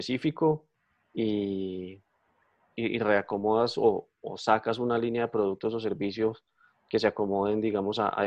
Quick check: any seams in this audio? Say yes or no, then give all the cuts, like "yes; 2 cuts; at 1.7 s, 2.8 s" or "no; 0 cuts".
no; 0 cuts